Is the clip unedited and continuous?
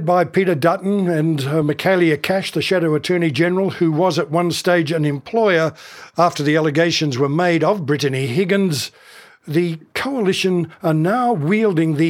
yes; 0 cuts

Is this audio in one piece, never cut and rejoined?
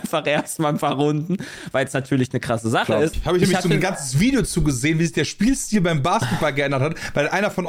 no; 1 cut; at 3.1 s

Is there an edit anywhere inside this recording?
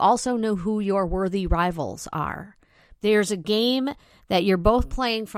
yes; 1 cut; at 2.9 s

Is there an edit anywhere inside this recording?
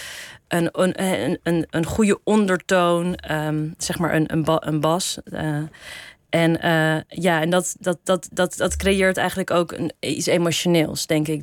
no; 0 cuts

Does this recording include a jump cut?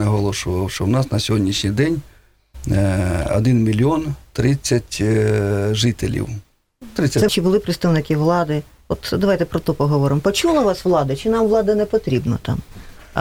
yes; 1 cut; at 7.3 s

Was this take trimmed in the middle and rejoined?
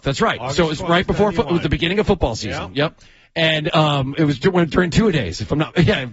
no; 0 cuts

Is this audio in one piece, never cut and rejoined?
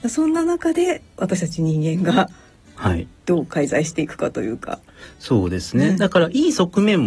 no; 1 cut; at 3.2 s

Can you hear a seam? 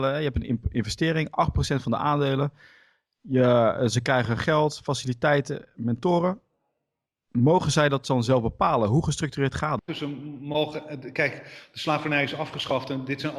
yes; 1 cut; at 9.8 s

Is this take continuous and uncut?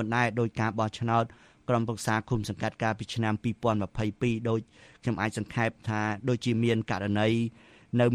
yes; 0 cuts

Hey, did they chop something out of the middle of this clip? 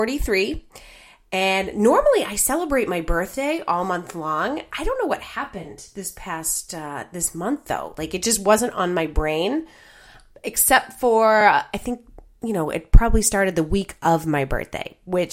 no; 0 cuts

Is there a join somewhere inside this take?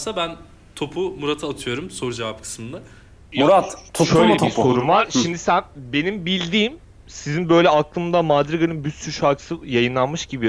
no; 0 cuts

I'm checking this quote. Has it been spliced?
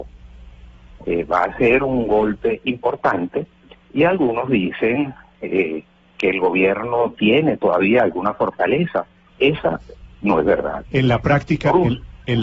yes; 2 cuts; at 1.0 s, 9.3 s

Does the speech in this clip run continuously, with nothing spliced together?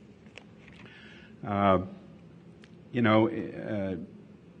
yes; 0 cuts

